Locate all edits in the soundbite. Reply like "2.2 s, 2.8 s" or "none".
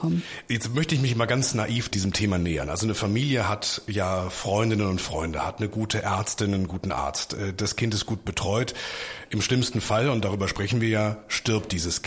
none